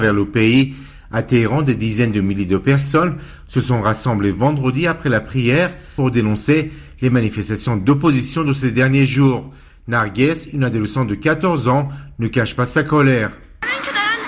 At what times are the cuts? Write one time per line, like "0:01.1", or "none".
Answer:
none